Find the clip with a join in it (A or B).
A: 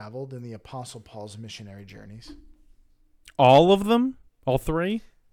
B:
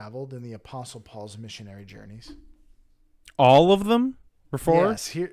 B